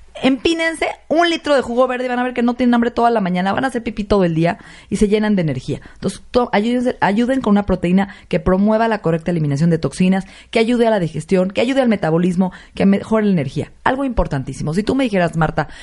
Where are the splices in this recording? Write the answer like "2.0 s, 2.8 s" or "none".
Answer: none